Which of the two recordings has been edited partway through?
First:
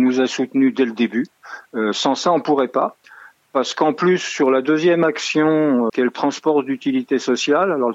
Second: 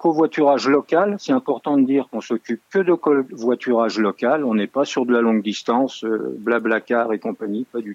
first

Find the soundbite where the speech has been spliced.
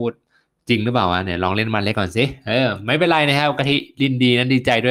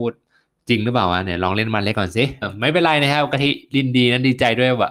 second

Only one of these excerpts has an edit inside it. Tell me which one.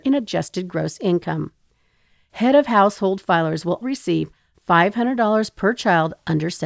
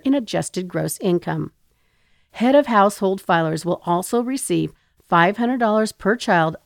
first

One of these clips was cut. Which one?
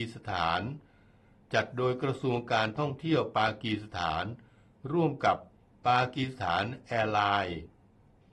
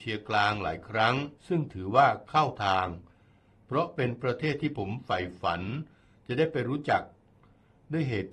second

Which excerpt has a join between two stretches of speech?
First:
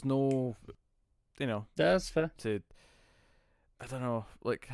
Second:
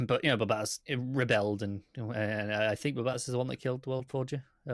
first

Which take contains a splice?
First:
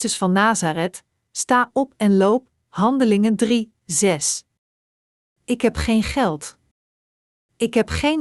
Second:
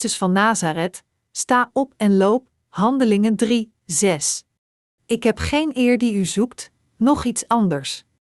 second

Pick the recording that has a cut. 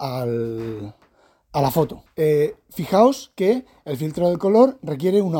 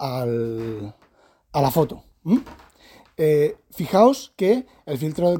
first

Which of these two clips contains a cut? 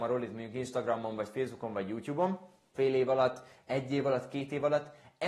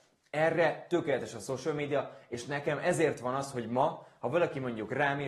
first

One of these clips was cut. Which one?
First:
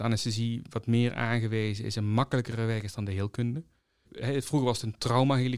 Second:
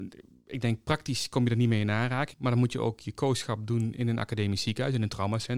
second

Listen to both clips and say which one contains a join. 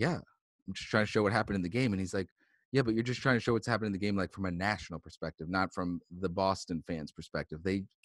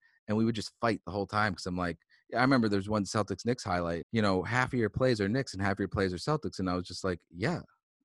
second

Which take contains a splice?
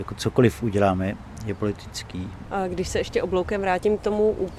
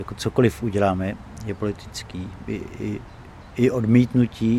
first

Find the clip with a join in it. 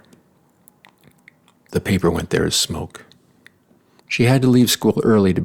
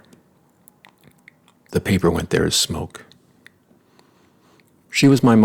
first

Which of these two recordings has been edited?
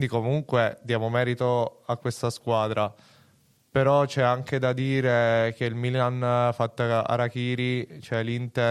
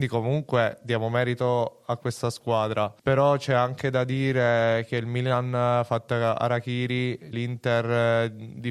second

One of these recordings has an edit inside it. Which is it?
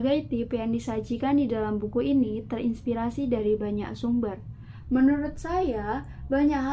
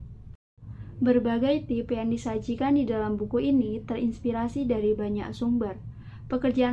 first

